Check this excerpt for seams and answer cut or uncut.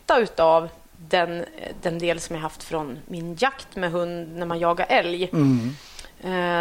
uncut